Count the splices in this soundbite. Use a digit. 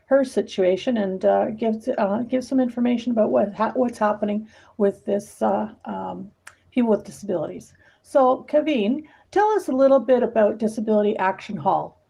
0